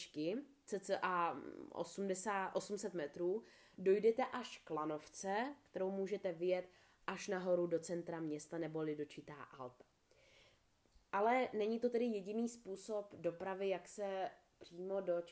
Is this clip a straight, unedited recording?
yes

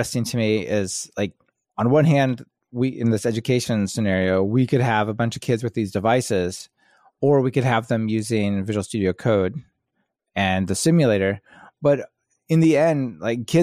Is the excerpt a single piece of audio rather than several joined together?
yes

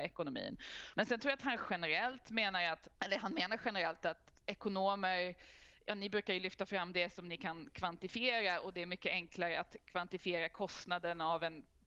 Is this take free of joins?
no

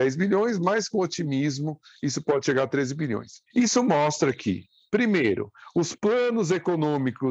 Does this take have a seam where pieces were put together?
yes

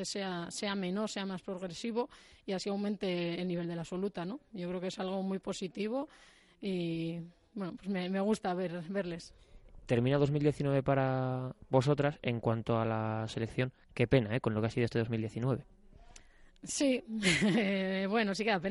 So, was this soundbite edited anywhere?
no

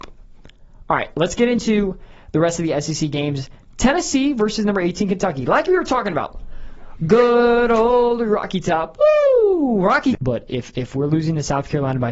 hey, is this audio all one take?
no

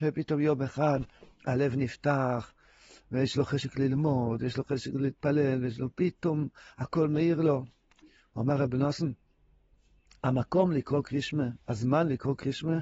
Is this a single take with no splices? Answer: yes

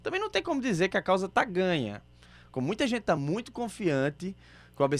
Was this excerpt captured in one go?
yes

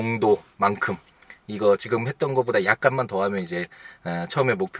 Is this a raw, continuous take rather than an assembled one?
yes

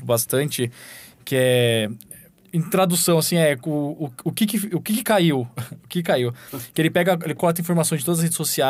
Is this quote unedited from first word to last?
yes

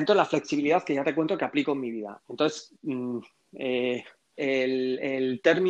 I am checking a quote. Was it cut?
yes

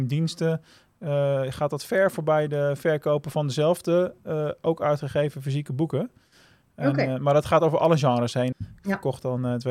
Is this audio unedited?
no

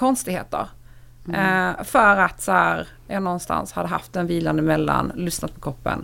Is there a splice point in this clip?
no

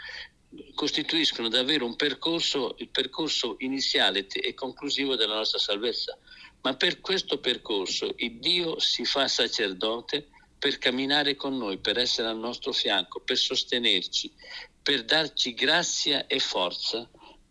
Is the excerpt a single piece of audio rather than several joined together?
yes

